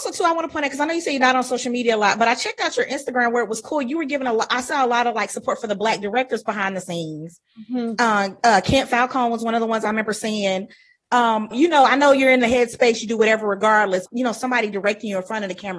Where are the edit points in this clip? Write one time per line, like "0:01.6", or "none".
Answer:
0:11.5
0:14.1